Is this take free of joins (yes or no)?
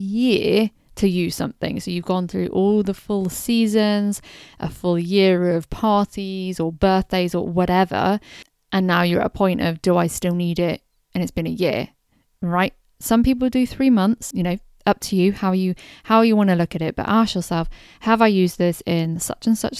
no